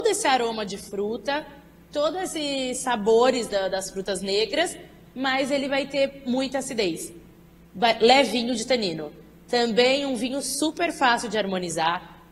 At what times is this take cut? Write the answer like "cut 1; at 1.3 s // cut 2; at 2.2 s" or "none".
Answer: cut 1; at 3.5 s